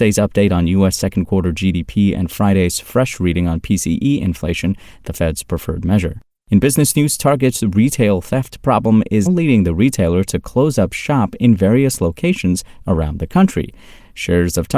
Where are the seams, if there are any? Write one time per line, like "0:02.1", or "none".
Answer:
0:09.3

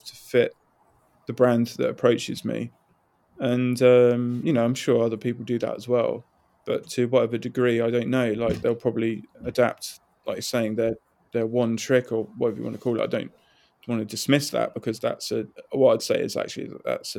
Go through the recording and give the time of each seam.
none

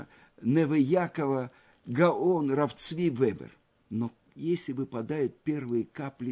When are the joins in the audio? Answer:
0:03.8

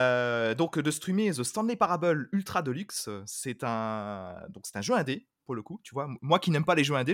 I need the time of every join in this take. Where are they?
none

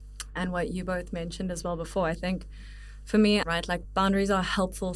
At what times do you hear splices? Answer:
0:03.4

